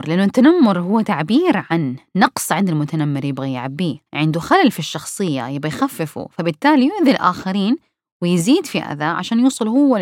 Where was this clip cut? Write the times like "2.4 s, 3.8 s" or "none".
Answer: 4.1 s